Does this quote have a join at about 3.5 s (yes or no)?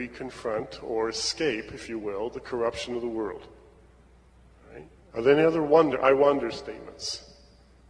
no